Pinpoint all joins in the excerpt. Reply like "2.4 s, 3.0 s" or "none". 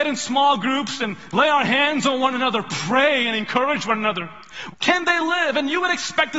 4.7 s